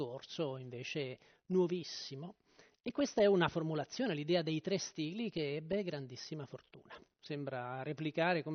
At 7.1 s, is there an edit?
yes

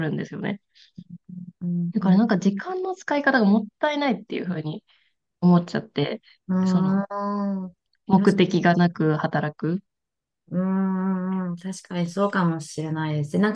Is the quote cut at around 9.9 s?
no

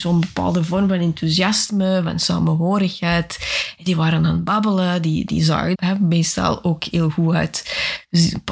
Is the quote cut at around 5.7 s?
yes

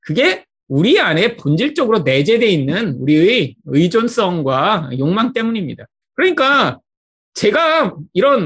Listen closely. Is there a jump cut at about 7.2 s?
no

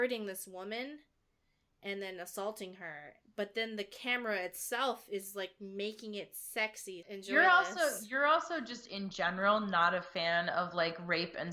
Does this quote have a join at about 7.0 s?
yes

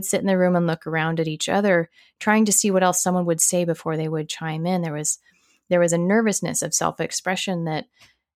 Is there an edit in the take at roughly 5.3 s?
no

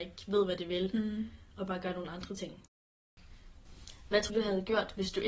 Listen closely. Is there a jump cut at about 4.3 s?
yes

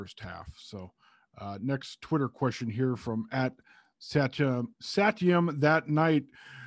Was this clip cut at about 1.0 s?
no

